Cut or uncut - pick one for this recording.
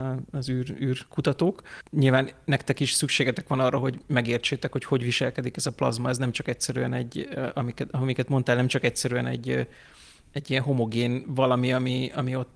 uncut